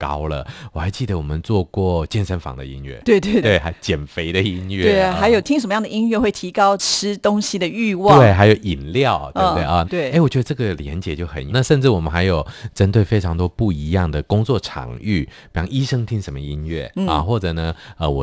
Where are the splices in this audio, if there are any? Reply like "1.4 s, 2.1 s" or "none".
3.4 s, 9.8 s, 11.5 s